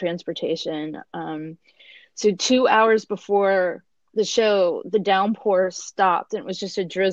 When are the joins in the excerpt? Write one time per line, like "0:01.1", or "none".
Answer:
none